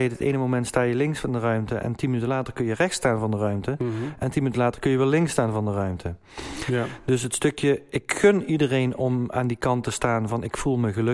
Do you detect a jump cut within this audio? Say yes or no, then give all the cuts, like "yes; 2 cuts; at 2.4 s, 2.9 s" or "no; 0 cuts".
no; 0 cuts